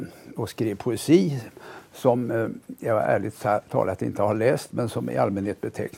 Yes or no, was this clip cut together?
no